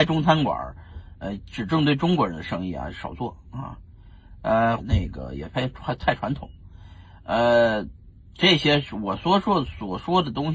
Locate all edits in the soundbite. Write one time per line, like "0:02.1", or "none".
0:04.8

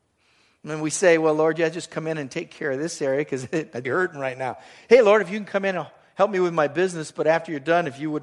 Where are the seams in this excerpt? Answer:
0:03.8

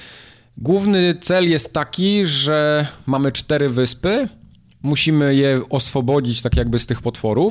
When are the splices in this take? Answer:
none

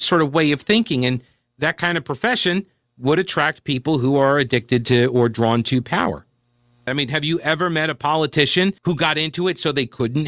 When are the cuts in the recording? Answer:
0:06.9
0:08.8

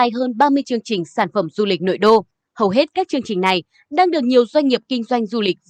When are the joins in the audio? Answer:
none

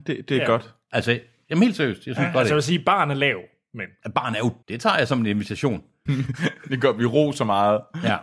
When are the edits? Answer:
0:04.6
0:06.1

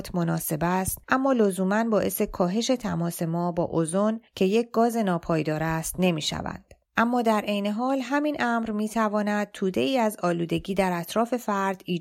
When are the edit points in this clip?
0:06.8

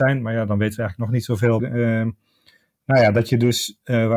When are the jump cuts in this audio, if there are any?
0:01.6

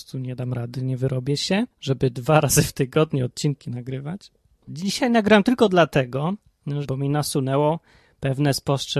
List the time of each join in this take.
0:04.7
0:06.8

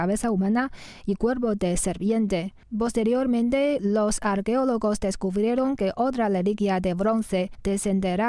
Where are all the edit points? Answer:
none

